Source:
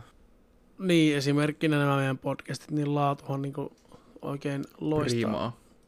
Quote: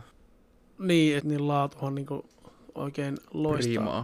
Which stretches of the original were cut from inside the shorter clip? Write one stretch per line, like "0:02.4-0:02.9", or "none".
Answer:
0:01.2-0:02.7